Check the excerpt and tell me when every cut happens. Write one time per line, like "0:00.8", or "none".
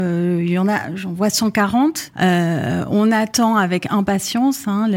0:02.1